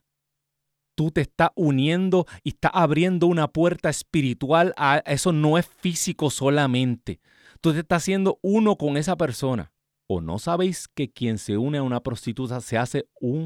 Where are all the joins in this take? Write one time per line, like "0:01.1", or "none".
0:09.9